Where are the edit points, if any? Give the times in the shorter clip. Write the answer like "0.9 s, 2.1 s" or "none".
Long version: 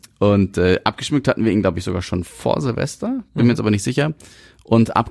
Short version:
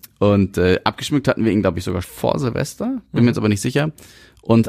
2.0 s